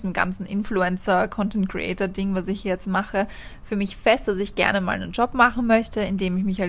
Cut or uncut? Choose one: uncut